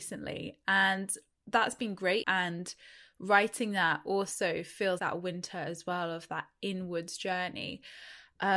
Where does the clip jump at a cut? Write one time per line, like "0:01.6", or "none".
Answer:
0:02.2
0:05.0

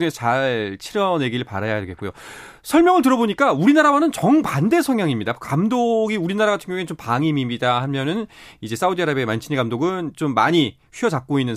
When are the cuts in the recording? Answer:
none

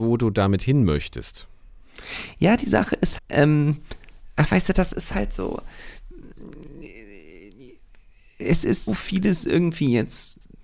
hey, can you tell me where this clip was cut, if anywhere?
0:03.2
0:08.9

